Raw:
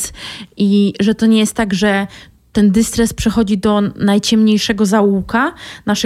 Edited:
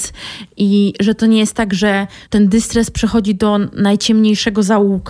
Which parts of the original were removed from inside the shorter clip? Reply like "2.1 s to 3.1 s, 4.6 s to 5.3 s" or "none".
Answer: 2.3 s to 2.5 s